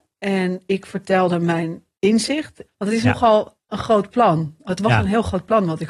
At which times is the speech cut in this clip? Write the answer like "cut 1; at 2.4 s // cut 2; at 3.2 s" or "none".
cut 1; at 2.7 s